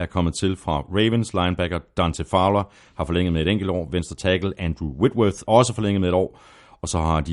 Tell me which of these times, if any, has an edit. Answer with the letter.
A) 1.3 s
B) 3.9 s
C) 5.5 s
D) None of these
C